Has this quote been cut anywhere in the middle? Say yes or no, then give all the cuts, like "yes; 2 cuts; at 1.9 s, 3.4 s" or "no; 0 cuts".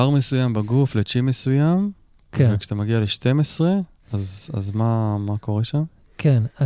no; 0 cuts